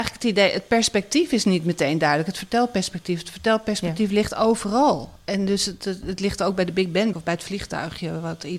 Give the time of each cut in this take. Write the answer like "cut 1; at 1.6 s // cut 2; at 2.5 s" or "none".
cut 1; at 7.1 s